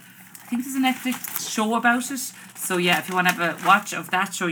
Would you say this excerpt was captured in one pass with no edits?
yes; 0 cuts

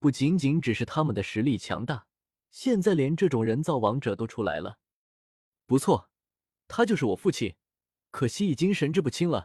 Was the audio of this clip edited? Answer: yes; 1 cut; at 2.4 s

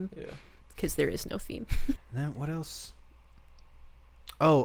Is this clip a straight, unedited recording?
no; 1 cut; at 2.0 s

